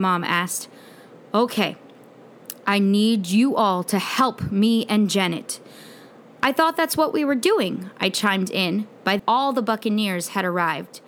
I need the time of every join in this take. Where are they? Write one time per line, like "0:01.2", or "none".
0:09.2